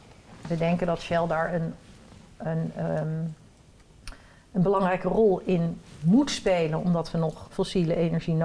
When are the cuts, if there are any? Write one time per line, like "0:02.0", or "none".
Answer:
0:07.5